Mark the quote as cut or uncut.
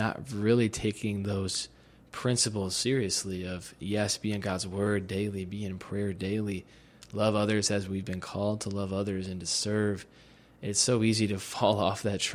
uncut